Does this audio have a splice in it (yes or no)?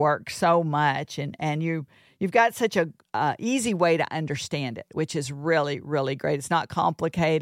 no